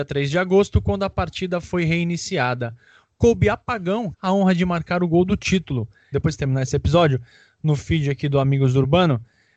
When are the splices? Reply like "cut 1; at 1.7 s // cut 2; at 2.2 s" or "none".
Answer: cut 1; at 3.0 s // cut 2; at 4.1 s // cut 3; at 6.1 s